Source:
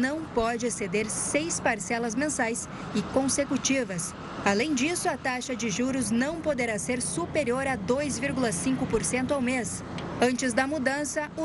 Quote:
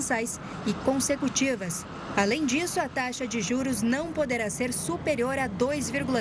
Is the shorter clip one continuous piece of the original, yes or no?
yes